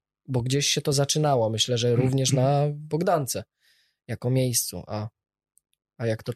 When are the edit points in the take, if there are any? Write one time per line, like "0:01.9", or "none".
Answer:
none